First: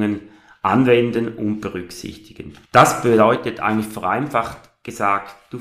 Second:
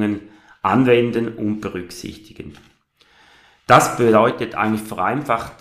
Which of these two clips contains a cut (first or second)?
first